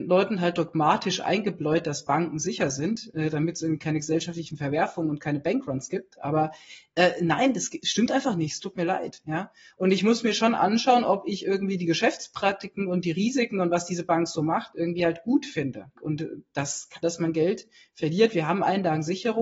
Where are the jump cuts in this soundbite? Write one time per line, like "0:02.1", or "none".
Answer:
0:16.0
0:17.0